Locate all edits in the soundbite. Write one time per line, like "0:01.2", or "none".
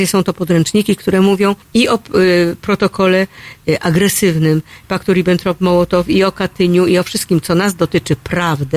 0:01.6